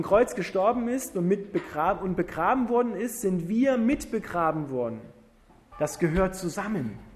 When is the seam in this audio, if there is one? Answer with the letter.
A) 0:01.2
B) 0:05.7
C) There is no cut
B